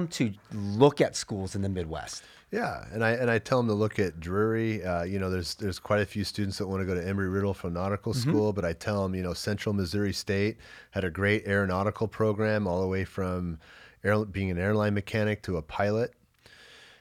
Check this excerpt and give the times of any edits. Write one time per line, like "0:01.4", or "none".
none